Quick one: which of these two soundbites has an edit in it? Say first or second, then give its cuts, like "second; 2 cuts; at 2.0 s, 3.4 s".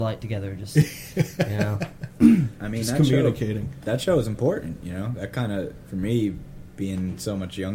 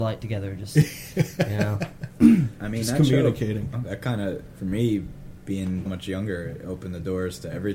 second; 2 cuts; at 3.7 s, 5.8 s